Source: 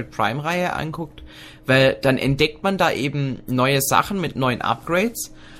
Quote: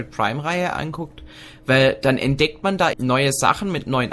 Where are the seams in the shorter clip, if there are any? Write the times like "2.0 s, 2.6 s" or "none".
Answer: 2.9 s

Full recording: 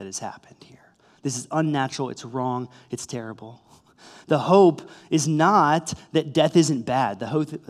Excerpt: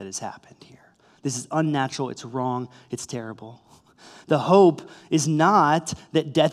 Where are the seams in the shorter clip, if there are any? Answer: none

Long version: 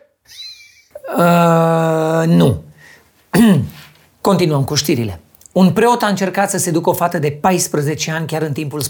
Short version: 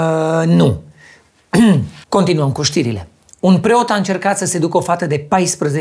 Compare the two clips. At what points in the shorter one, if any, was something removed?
2.0 s

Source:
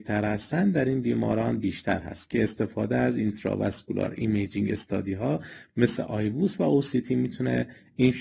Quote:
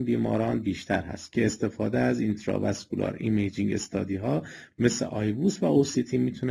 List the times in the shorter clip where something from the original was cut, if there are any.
none

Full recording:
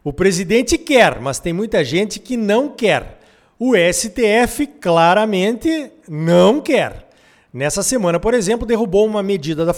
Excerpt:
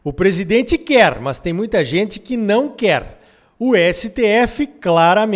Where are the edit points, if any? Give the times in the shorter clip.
none

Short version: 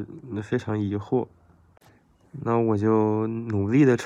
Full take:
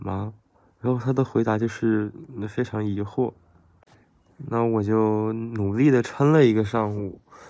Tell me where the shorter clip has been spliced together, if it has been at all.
none

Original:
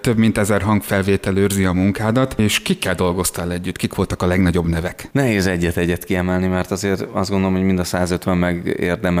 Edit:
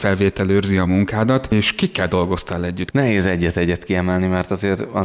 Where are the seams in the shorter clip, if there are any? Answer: 2.9 s

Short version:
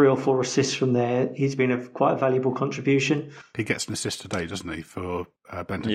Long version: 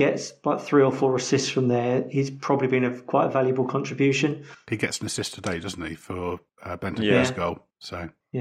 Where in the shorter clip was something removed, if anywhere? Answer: 1.6 s

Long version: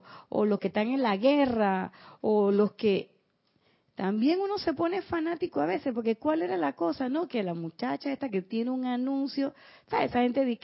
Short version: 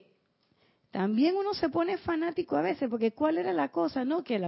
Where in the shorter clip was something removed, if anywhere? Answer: none

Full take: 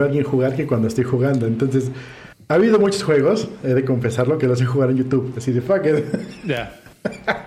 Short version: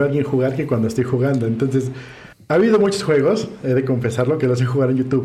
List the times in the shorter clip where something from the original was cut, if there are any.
none

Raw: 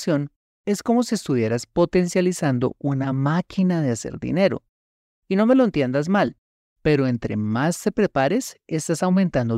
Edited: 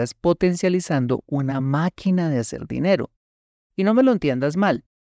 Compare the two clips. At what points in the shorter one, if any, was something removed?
none

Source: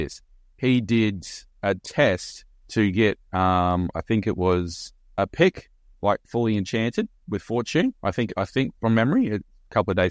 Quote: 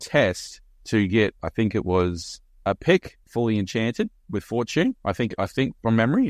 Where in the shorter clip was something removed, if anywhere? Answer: 1.4 s, 3.2 s

